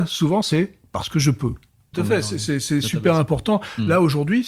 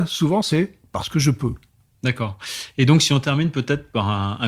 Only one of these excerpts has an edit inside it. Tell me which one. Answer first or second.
first